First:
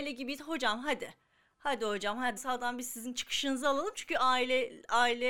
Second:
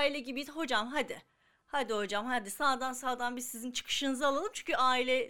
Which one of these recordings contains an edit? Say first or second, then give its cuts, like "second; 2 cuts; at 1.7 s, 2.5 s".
first; 1 cut; at 2.4 s